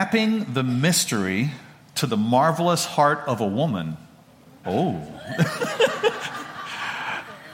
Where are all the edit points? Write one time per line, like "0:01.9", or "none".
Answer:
0:04.6

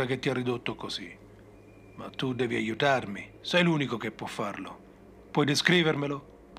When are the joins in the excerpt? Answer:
0:03.4

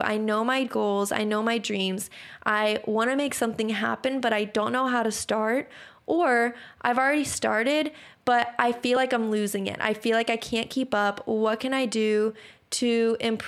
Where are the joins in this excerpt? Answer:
none

